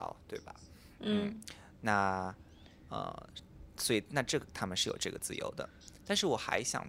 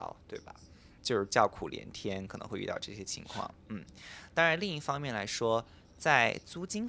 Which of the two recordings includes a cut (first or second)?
second